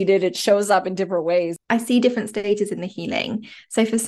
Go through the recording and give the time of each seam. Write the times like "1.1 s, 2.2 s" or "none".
none